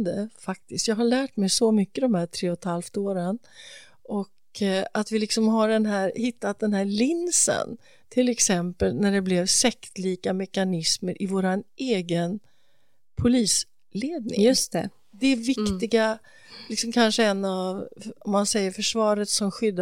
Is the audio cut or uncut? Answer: uncut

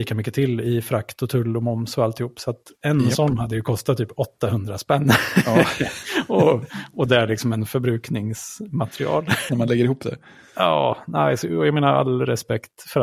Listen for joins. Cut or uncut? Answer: cut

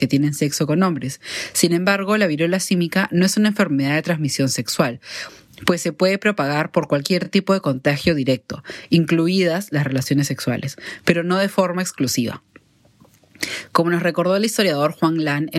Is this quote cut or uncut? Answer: uncut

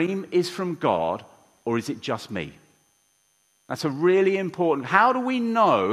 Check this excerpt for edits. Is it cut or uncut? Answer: uncut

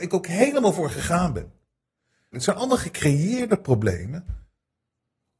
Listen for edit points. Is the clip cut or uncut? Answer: cut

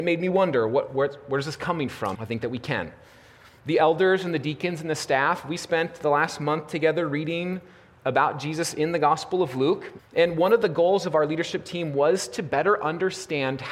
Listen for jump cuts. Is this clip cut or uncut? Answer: cut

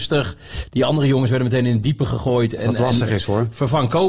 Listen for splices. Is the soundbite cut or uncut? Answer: uncut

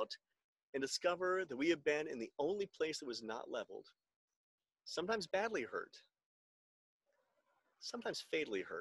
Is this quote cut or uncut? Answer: cut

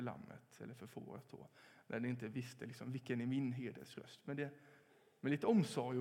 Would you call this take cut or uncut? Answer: uncut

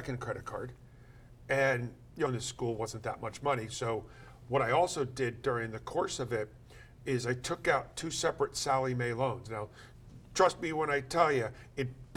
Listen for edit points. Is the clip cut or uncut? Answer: cut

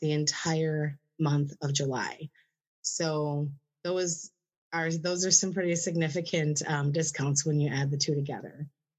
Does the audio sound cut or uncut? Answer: uncut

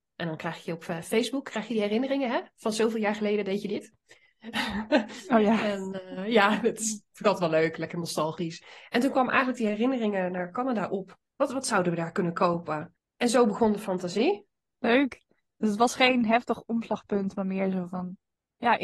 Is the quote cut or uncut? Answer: cut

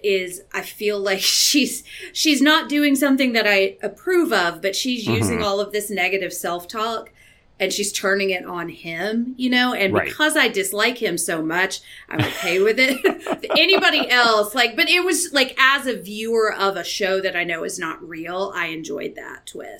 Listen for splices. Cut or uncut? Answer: uncut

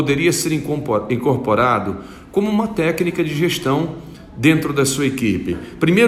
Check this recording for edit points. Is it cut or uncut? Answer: uncut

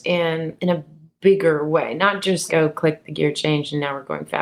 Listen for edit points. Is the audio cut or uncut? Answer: cut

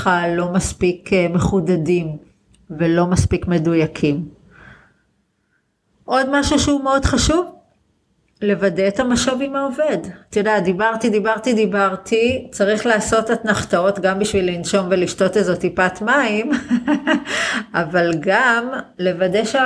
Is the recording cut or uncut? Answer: uncut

